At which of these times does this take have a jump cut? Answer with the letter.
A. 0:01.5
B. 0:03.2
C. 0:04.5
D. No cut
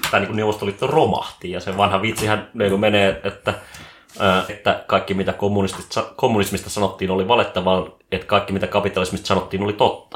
C